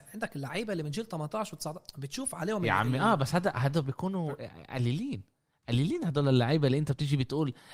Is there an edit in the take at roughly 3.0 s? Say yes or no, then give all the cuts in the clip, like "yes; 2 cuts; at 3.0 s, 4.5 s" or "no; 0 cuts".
no; 0 cuts